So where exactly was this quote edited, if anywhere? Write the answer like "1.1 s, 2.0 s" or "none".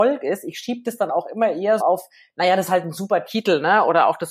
1.8 s